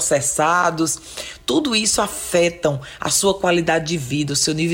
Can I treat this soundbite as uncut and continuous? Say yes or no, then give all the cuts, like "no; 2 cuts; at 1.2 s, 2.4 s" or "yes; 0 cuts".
yes; 0 cuts